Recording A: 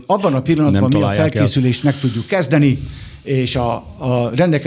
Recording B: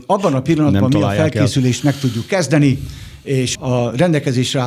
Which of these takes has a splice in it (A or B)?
B